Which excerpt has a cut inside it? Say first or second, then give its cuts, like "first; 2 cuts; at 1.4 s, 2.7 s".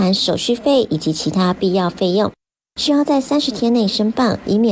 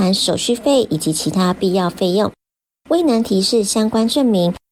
first; 1 cut; at 2.6 s